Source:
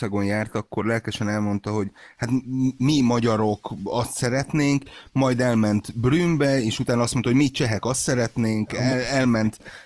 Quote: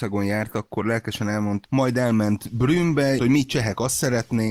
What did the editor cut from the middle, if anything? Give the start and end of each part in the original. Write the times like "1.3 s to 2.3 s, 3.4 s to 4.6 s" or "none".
1.6 s to 5.1 s, 6.6 s to 7.2 s